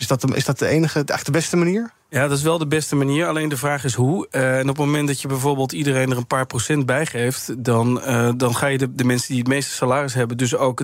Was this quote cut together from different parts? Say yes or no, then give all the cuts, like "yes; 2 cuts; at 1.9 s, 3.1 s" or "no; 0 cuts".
no; 0 cuts